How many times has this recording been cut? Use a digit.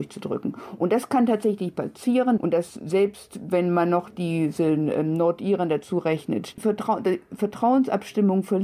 2